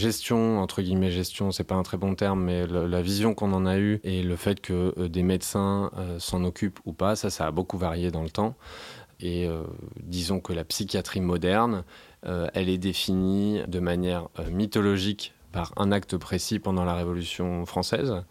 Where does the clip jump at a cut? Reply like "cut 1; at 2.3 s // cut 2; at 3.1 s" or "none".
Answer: cut 1; at 13.7 s